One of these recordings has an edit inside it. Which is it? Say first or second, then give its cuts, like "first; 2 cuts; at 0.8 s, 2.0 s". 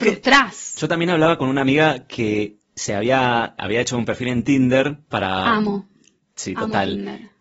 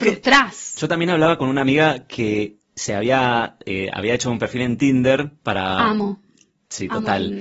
first; 1 cut; at 3.6 s